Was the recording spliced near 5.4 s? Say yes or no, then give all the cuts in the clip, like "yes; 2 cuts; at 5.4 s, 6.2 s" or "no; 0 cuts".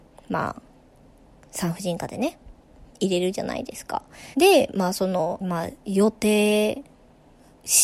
yes; 2 cuts; at 4.3 s, 5.4 s